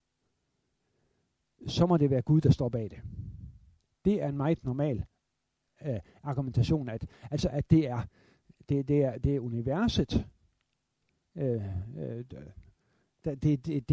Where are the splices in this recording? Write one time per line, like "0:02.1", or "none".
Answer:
none